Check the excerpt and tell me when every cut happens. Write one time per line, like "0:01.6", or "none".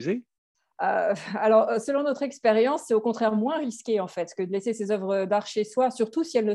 none